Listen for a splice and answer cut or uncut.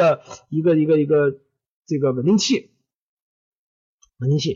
uncut